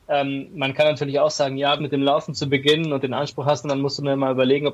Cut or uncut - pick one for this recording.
cut